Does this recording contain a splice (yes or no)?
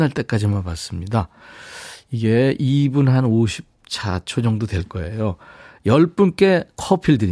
no